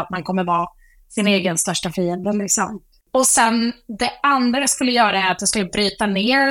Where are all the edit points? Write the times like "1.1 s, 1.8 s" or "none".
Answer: none